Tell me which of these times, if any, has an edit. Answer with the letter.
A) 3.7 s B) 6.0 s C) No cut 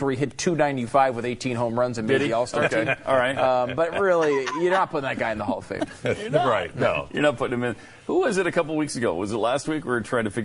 C